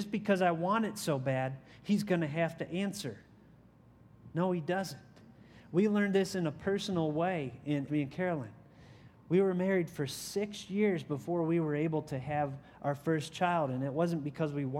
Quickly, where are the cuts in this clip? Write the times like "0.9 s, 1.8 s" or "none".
7.9 s